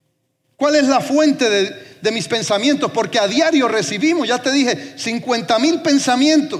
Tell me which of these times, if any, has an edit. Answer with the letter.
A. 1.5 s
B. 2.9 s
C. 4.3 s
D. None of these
D